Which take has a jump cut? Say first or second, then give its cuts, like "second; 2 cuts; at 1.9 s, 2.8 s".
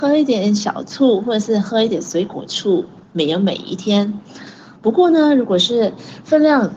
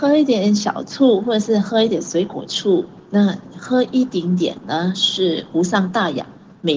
first; 1 cut; at 3.0 s